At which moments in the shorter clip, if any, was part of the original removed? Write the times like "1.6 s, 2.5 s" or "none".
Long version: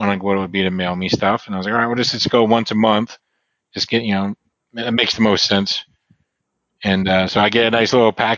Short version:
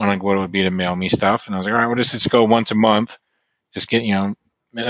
none